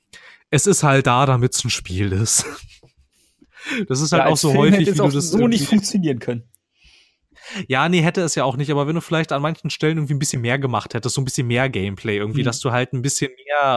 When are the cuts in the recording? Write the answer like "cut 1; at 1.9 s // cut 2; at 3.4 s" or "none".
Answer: none